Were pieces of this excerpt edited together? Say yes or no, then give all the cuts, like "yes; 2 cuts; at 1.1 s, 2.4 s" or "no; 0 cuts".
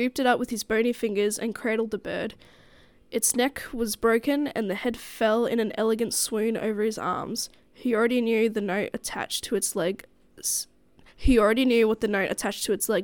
no; 0 cuts